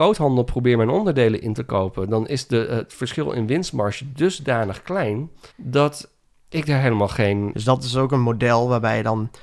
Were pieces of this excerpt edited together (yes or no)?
yes